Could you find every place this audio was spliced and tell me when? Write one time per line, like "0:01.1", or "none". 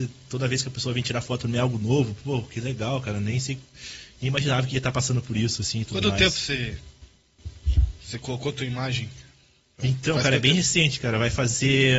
none

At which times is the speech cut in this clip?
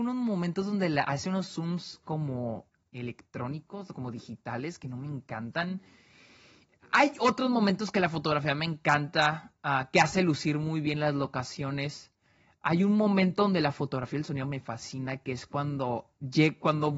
none

